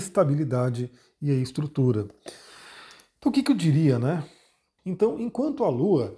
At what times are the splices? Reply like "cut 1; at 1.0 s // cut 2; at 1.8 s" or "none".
cut 1; at 4.8 s